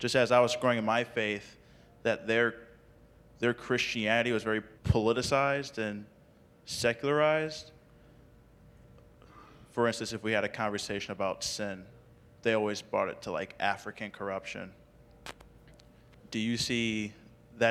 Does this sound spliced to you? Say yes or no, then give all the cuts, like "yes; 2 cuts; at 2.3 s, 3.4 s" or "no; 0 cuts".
yes; 1 cut; at 4.8 s